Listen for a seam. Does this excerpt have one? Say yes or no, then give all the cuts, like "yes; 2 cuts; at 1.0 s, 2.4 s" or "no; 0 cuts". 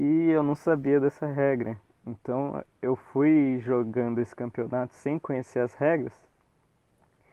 no; 0 cuts